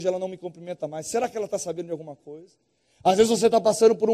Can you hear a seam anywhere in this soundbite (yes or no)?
no